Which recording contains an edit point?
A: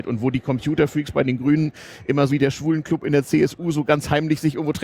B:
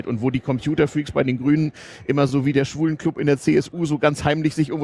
A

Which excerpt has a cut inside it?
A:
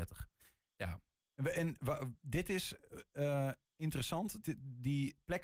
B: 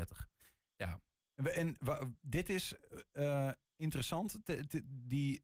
A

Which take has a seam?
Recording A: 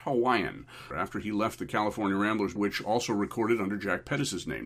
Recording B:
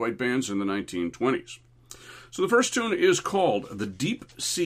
A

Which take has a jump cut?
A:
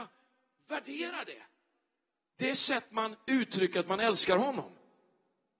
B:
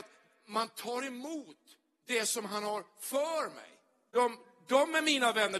B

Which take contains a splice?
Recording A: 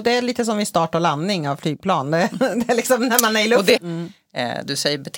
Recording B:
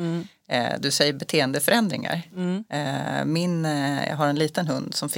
A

